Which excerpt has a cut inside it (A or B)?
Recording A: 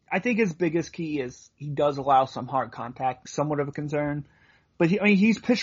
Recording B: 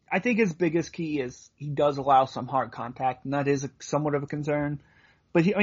A